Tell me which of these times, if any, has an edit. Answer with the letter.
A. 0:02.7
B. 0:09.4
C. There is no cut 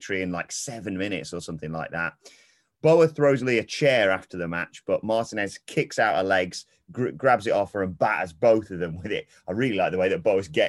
C